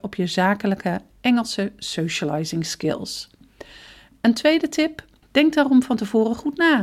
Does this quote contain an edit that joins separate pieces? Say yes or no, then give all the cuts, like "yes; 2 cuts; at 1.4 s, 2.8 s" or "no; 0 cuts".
yes; 1 cut; at 5.2 s